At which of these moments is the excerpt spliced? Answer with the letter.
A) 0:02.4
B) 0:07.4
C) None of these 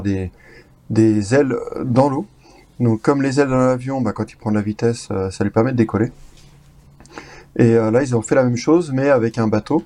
C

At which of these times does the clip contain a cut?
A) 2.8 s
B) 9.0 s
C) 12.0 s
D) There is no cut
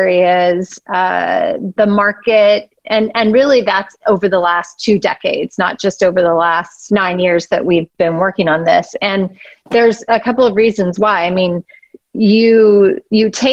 A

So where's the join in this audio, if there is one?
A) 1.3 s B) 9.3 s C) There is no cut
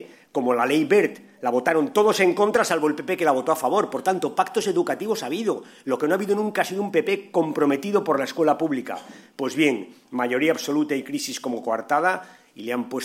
C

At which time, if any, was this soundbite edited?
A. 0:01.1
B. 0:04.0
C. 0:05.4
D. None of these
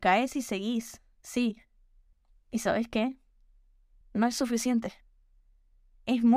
B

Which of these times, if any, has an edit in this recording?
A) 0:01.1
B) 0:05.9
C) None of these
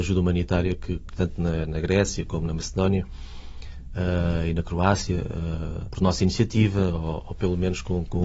A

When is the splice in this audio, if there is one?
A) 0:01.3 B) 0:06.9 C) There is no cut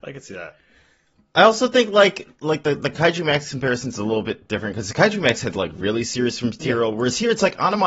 C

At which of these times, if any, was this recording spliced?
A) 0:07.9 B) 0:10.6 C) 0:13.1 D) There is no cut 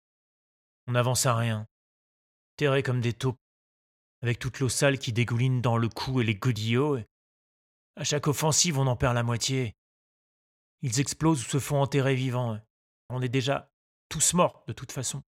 C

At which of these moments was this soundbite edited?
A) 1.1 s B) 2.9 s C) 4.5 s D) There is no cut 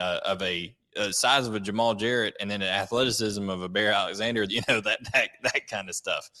C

